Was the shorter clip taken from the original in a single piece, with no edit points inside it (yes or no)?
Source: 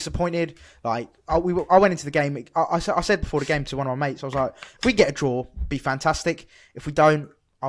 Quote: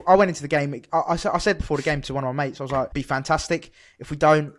no